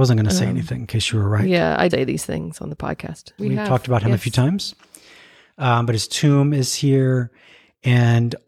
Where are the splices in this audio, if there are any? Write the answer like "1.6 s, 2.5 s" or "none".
1.9 s, 3.4 s